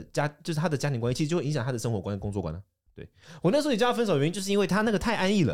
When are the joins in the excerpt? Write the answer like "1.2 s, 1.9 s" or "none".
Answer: 2.9 s